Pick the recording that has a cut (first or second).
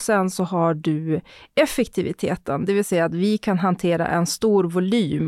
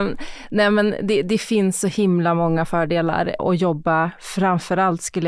second